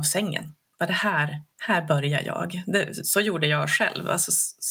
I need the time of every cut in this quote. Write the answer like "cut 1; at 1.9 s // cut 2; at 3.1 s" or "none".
cut 1; at 1.5 s